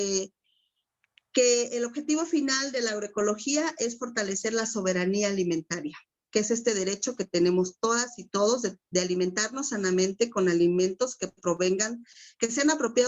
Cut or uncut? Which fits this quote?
uncut